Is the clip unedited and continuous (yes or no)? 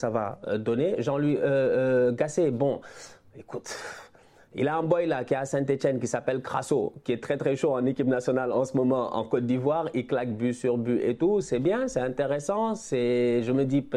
yes